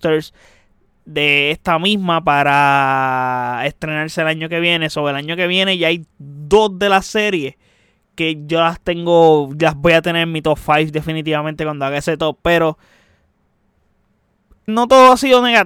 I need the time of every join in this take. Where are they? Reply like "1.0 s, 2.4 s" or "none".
14.7 s